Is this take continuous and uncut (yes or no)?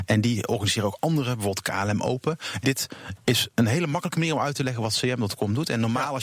no